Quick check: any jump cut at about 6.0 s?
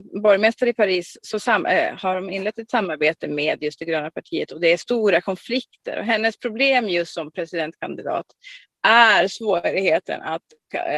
no; 0 cuts

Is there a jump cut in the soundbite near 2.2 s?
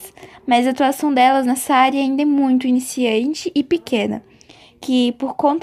no; 0 cuts

